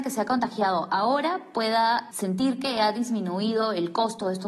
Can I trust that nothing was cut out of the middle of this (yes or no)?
no